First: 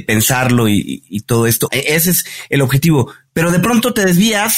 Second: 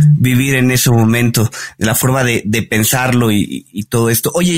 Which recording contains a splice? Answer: first; 1 cut; at 1.7 s

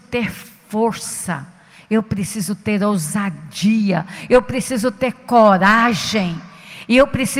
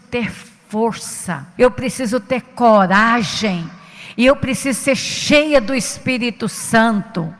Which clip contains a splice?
second; 1 cut; at 1.6 s

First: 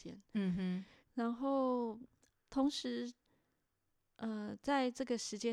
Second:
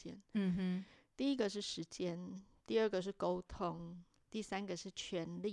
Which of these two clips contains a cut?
first; 2 cuts; at 1.0 s, 2.3 s

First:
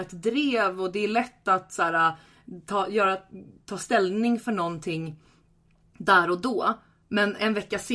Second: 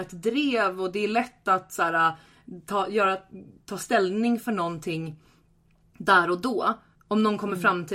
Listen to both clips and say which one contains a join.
second; 1 cut; at 6.9 s

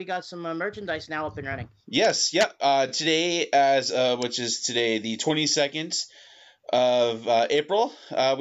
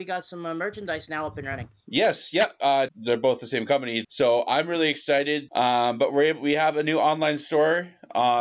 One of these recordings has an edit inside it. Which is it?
second; 3 cuts; at 2.9 s, 4.0 s, 5.5 s

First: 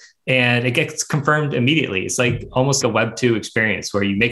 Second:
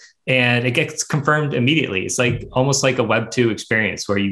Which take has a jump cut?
first; 1 cut; at 2.8 s

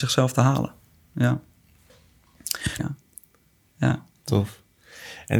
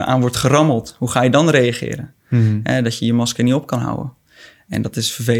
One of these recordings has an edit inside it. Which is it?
first; 1 cut; at 2.8 s

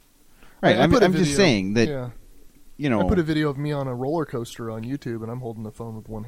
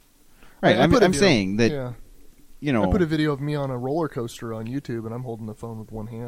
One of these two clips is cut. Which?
second; 1 cut; at 1.1 s

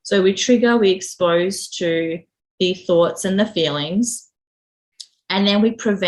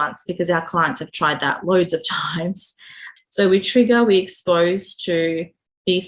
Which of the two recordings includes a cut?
second; 1 cut; at 3.2 s

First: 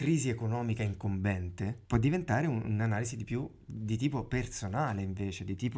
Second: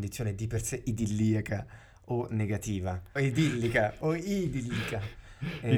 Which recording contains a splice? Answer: second; 1 cut; at 3.2 s

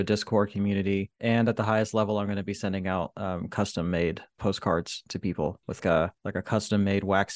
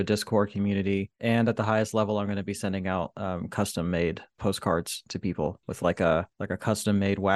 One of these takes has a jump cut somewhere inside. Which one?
first; 1 cut; at 5.8 s

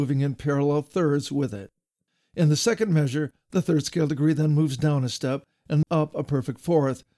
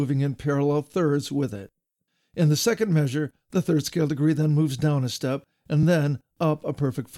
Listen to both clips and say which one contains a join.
first; 1 cut; at 5.8 s

